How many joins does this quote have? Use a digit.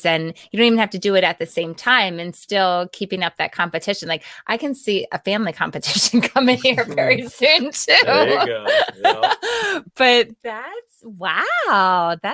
1